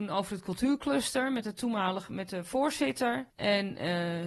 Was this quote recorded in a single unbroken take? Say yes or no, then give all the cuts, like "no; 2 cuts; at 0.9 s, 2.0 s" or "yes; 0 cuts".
no; 1 cut; at 3.3 s